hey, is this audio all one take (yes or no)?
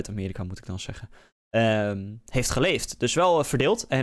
yes